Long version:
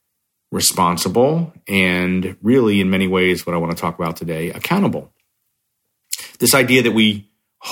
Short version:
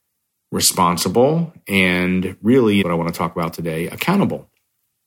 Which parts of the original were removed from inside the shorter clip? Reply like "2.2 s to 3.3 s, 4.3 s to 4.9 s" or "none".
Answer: 2.8 s to 3.4 s